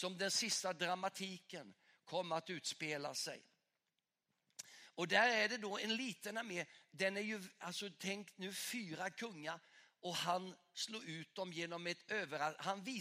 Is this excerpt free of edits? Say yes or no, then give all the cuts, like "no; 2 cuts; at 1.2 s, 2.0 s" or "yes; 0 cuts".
yes; 0 cuts